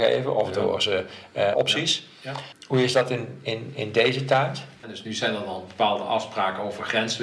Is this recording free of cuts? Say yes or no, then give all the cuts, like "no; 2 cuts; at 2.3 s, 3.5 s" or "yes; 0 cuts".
no; 2 cuts; at 1.5 s, 4.8 s